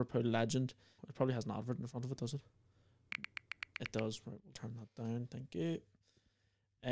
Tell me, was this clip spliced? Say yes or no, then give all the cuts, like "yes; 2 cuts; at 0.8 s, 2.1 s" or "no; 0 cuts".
yes; 2 cuts; at 1.0 s, 4.5 s